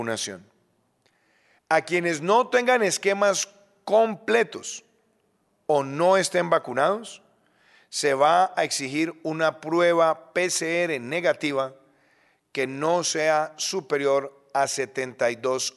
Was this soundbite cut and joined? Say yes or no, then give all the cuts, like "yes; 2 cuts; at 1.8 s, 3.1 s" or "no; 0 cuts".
yes; 1 cut; at 1.6 s